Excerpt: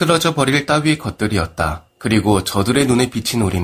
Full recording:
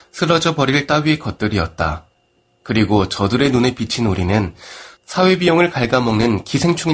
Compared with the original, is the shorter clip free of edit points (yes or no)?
no